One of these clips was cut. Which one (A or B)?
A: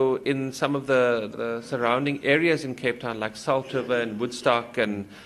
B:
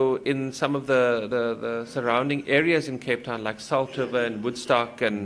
A